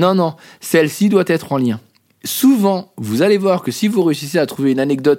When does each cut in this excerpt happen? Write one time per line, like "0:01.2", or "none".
none